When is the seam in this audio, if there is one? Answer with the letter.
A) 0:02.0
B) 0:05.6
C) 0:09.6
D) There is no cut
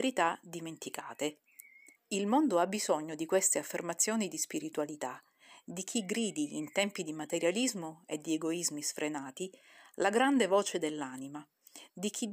A